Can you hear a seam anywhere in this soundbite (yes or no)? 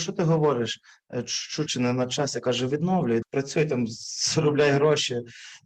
yes